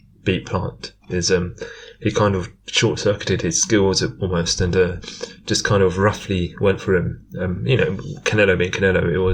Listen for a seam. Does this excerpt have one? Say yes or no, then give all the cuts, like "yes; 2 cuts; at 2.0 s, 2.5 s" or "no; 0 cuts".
no; 0 cuts